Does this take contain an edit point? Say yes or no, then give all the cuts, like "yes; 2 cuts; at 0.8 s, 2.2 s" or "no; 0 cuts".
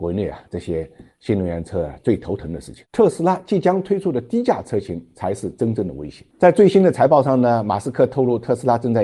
no; 0 cuts